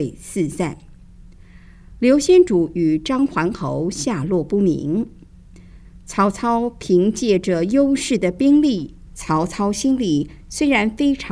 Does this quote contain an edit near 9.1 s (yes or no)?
yes